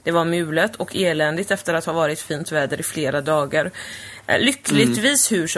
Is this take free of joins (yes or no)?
yes